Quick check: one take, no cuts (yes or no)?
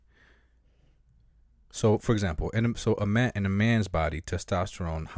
yes